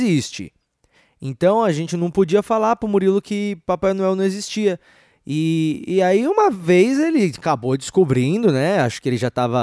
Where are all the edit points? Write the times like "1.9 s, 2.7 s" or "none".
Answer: none